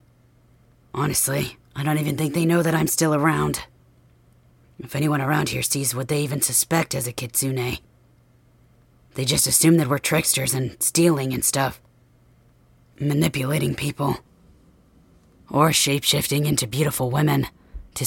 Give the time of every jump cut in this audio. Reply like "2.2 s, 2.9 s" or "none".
none